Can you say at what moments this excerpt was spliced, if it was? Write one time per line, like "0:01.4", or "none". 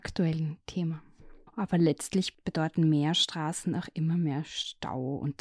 0:01.5